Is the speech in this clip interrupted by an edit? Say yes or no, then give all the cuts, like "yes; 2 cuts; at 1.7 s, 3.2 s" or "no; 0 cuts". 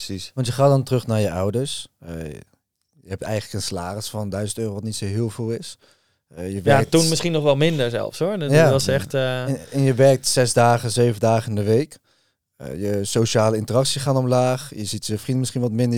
no; 0 cuts